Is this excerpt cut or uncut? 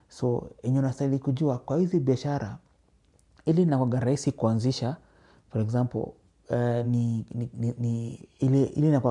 uncut